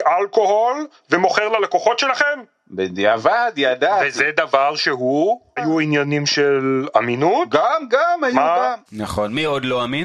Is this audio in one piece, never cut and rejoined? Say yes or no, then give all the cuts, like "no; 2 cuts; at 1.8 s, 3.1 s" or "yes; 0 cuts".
no; 2 cuts; at 5.6 s, 8.9 s